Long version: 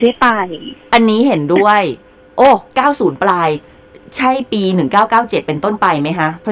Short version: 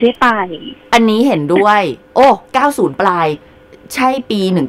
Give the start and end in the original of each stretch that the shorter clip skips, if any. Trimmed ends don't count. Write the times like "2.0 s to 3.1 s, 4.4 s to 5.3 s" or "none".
2.0 s to 2.3 s